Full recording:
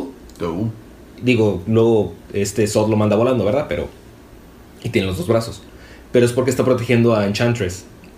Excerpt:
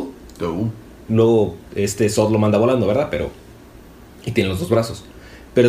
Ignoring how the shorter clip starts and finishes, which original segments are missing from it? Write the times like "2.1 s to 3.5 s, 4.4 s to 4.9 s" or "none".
1.1 s to 1.6 s